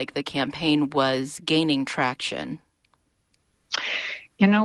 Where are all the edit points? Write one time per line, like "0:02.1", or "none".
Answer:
none